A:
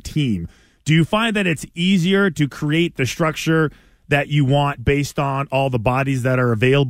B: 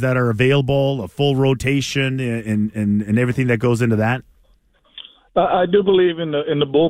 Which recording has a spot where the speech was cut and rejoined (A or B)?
A